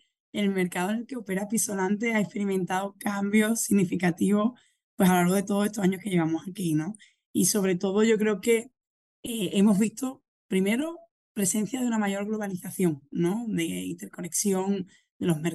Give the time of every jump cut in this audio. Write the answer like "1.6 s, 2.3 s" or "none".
none